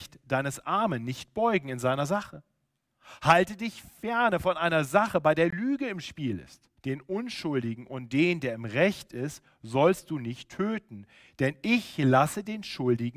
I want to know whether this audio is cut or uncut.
cut